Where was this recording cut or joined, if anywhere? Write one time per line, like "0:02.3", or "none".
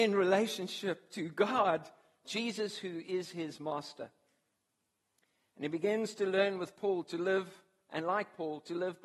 0:02.2